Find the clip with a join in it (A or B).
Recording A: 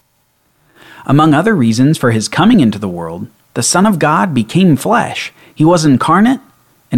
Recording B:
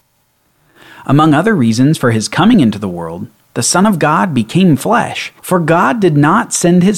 B